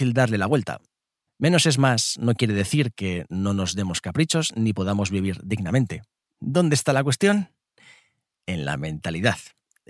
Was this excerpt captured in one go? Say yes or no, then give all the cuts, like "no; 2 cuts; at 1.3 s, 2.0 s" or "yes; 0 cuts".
no; 1 cut; at 1.3 s